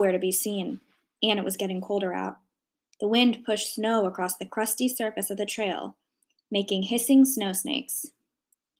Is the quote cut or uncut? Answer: uncut